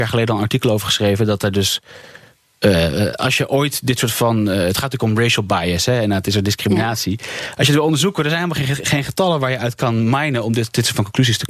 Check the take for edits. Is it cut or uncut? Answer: uncut